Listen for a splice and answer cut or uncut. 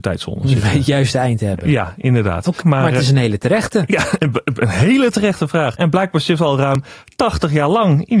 cut